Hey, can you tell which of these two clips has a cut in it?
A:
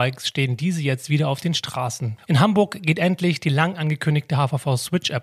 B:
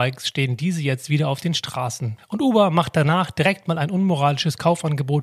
A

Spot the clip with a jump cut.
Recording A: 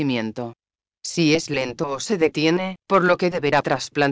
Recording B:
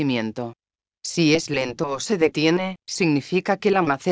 A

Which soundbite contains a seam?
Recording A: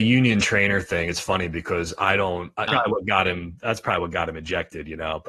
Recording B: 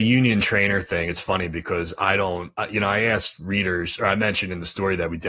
A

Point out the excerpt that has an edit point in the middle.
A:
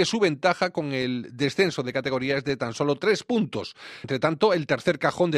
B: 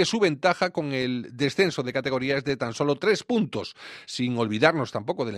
A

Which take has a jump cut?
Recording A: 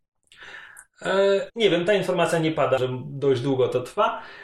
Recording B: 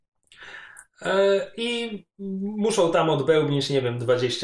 A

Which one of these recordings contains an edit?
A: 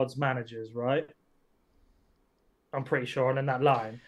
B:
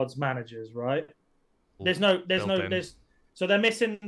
B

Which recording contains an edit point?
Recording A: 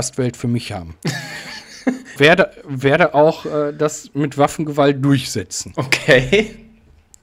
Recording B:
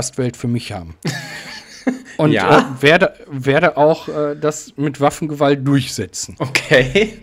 A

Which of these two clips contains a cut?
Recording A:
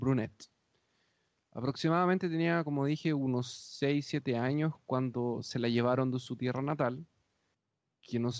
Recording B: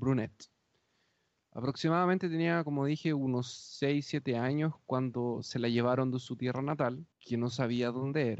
B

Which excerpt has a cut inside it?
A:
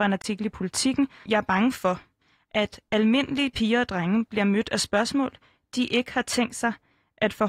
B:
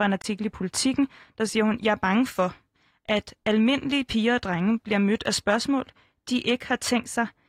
A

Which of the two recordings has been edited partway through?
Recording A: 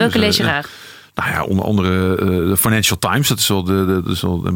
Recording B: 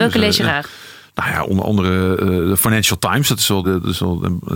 B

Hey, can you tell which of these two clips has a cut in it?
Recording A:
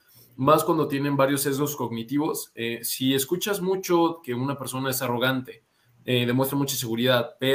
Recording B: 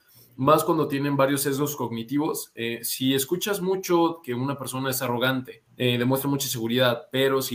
B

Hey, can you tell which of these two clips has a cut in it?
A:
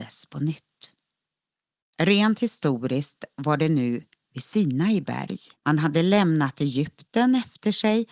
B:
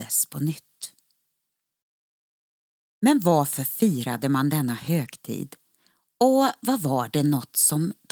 A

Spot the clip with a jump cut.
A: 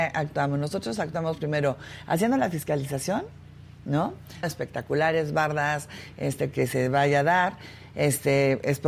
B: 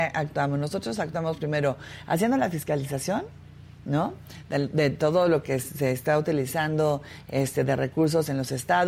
A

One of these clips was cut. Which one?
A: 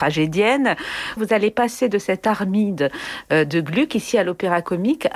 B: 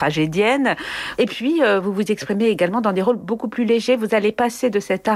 A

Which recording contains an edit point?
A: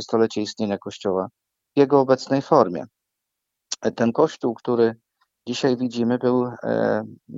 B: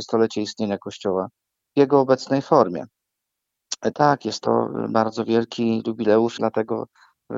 B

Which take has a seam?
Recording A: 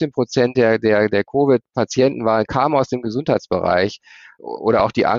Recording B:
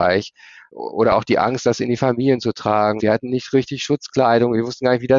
B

